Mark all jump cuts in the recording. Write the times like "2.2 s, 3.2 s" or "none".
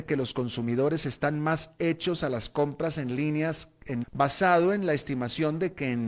4.0 s